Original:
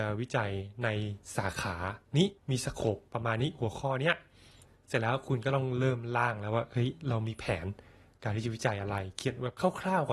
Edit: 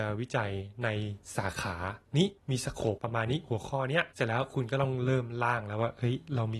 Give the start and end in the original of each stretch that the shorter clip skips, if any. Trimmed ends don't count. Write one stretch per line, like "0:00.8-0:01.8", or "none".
0:03.0-0:03.1
0:04.2-0:04.8